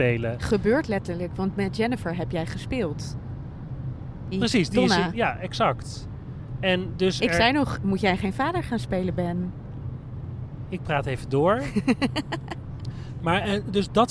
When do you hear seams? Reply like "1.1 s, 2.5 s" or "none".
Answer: 4.3 s